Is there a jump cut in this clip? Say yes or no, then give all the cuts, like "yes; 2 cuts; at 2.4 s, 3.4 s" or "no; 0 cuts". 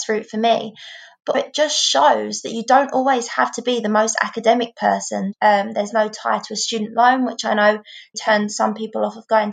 yes; 3 cuts; at 1.3 s, 5.3 s, 8.1 s